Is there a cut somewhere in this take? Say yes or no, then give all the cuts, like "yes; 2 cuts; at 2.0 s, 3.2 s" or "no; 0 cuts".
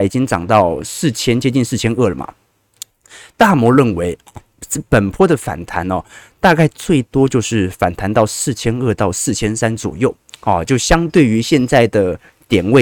no; 0 cuts